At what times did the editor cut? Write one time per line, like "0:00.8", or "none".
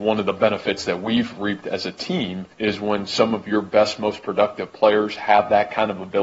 0:02.5